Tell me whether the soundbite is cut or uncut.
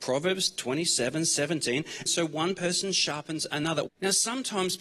cut